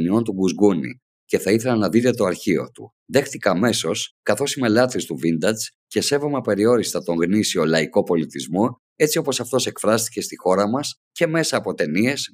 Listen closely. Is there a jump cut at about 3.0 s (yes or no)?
yes